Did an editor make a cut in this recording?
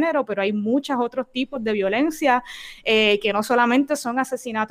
no; 0 cuts

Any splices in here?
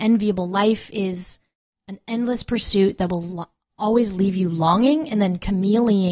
no; 0 cuts

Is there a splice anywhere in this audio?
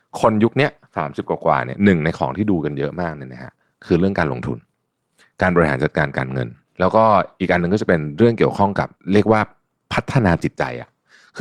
no; 0 cuts

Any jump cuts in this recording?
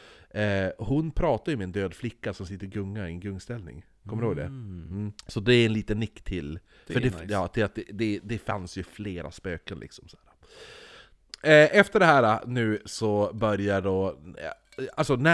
yes; 1 cut; at 5.2 s

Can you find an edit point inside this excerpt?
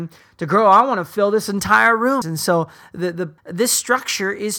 yes; 2 cuts; at 2.2 s, 3.4 s

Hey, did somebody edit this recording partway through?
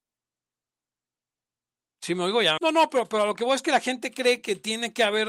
yes; 1 cut; at 2.6 s

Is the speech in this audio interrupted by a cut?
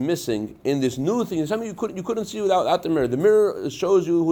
no; 0 cuts

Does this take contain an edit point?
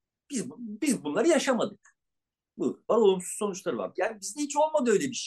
yes; 2 cuts; at 2.9 s, 3.9 s

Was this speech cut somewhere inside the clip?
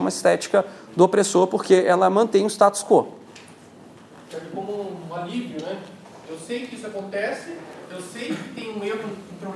no; 0 cuts

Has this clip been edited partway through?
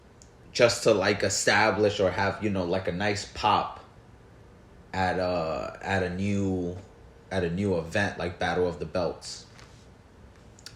no; 0 cuts

